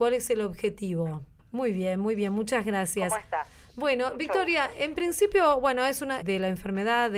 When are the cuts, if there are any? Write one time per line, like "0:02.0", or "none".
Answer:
0:01.4
0:06.2